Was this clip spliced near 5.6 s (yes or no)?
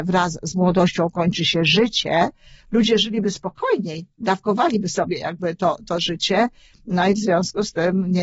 no